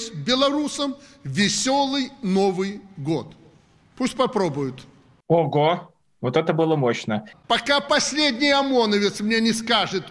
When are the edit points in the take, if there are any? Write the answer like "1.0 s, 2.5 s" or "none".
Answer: 5.2 s, 7.3 s